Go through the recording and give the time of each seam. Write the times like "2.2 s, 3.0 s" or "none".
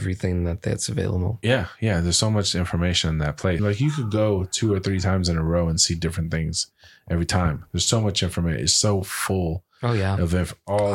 3.6 s